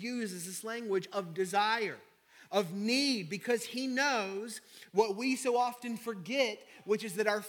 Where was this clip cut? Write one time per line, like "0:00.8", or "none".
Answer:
none